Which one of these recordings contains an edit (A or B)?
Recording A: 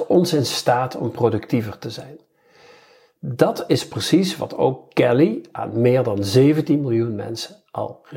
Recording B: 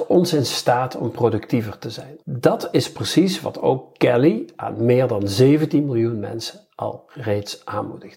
B